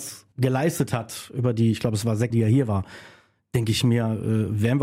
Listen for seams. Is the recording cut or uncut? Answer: cut